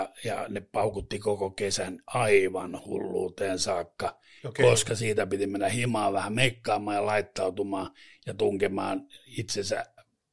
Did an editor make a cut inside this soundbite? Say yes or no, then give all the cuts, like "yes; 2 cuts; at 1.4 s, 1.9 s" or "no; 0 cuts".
yes; 1 cut; at 4.4 s